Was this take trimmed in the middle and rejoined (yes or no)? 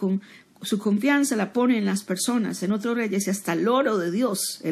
no